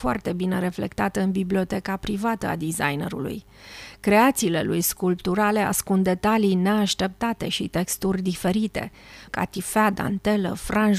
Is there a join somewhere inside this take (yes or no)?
yes